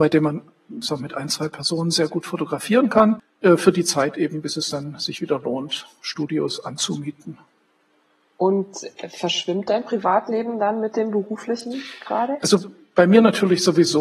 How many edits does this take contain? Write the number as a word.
zero